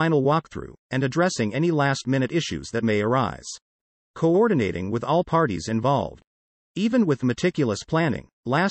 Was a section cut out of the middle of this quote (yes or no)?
yes